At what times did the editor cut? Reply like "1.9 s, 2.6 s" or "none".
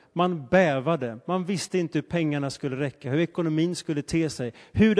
none